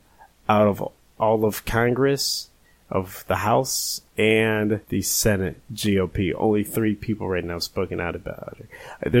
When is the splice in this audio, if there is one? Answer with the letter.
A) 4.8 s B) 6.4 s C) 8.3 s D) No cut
A